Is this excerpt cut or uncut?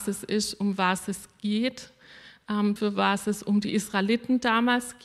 cut